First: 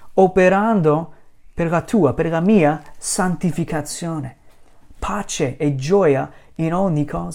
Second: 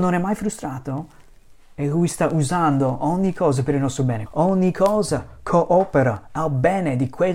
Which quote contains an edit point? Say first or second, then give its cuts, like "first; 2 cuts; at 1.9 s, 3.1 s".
second; 1 cut; at 4.3 s